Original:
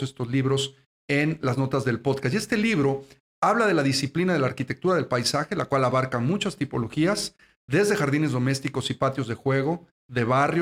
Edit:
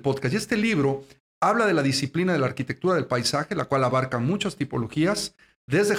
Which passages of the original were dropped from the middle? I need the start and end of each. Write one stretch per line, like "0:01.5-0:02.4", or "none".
none